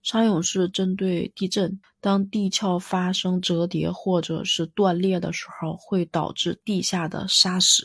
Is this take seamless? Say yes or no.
no